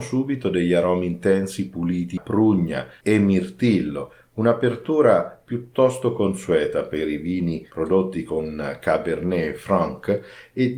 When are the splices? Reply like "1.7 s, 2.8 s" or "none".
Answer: 2.2 s